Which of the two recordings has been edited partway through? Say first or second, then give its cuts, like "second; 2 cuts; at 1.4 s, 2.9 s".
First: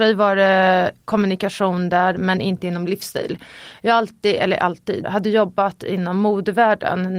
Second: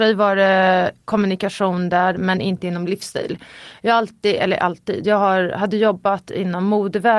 first; 1 cut; at 5.0 s